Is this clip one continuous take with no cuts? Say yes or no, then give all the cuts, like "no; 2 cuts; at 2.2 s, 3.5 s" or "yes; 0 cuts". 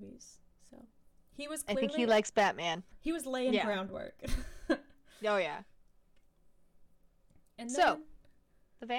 no; 1 cut; at 2.9 s